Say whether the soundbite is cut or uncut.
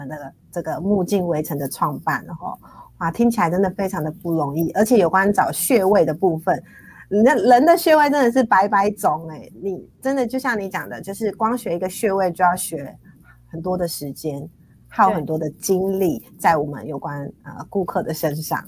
uncut